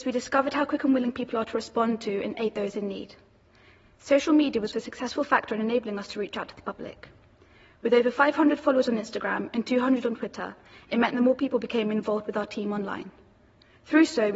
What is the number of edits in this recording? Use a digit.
1